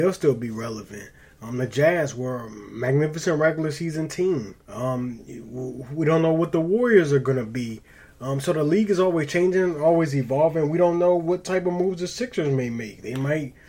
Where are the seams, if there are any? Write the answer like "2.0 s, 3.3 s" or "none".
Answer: 4.6 s